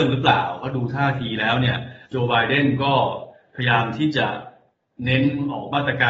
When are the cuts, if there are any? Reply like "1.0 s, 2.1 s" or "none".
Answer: 2.0 s